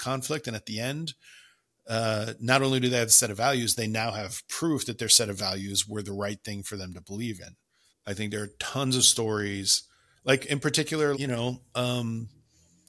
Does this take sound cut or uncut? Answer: cut